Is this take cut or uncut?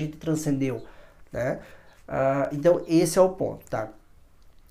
uncut